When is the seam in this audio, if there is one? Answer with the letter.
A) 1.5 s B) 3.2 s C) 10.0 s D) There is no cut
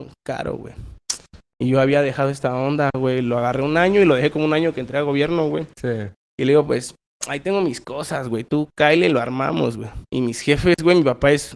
C